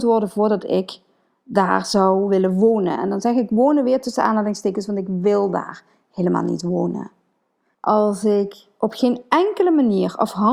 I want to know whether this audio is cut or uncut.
cut